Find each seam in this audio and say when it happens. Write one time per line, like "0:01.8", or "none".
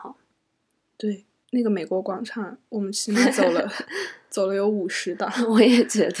0:01.4